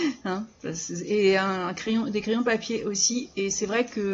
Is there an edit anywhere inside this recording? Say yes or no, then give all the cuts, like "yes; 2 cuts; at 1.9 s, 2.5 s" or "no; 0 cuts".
no; 0 cuts